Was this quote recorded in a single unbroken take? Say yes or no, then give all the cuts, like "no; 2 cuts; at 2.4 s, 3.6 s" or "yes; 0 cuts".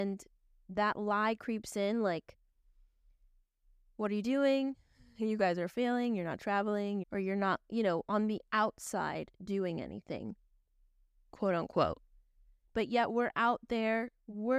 no; 2 cuts; at 7.0 s, 12.7 s